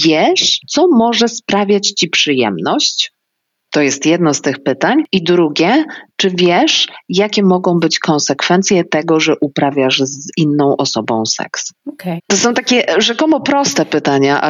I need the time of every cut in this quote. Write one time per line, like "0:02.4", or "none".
0:12.2

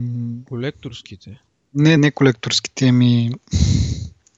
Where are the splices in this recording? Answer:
0:02.0

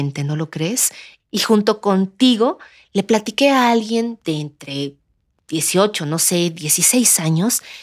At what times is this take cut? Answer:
0:01.2

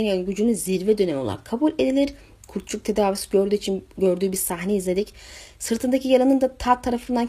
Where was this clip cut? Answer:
0:02.4

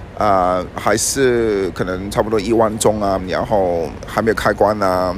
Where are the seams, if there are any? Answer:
0:03.2

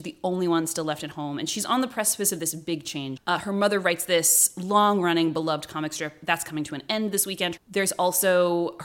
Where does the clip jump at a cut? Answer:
0:03.2
0:07.6

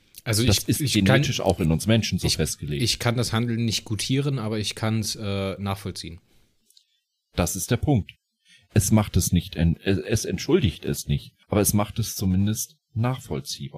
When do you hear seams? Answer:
0:11.4

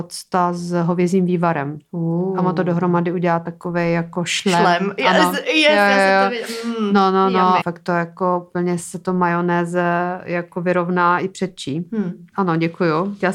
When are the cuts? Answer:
0:07.6
0:12.3

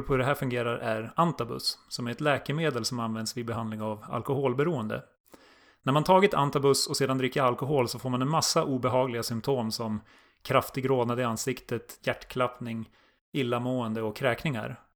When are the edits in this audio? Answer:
0:12.0

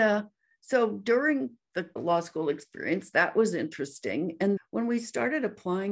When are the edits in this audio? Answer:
0:02.0
0:04.6

